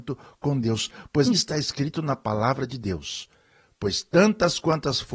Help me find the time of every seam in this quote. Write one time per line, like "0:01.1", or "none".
0:01.2